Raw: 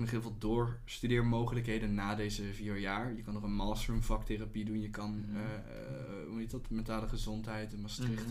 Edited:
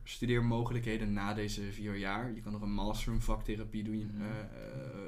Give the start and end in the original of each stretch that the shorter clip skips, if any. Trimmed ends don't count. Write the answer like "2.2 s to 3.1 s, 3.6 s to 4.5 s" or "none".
4.8 s to 5.1 s